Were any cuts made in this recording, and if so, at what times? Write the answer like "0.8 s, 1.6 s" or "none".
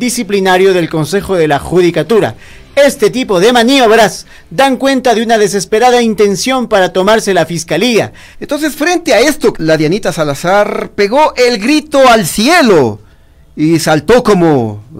8.3 s, 9.5 s